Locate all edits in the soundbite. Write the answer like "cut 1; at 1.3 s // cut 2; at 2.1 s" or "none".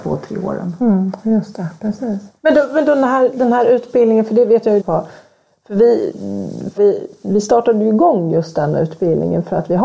cut 1; at 2.4 s // cut 2; at 4.8 s // cut 3; at 6.8 s